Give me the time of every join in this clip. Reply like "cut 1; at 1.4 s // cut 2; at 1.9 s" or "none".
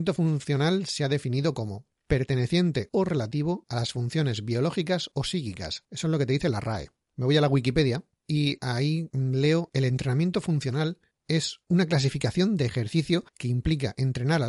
cut 1; at 7.1 s // cut 2; at 11.6 s